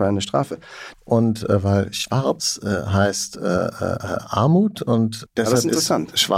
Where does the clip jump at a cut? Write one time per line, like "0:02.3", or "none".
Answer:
0:00.9
0:05.3